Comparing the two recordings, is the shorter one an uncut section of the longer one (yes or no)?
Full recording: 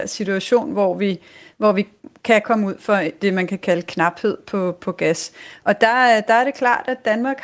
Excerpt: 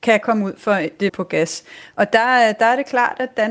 no